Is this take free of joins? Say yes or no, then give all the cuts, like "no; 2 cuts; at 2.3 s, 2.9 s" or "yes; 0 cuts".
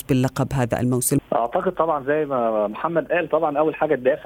no; 1 cut; at 1.2 s